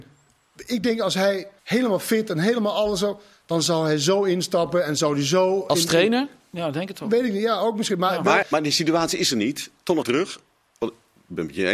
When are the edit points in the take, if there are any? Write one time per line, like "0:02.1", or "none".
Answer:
0:01.6
0:08.4
0:10.0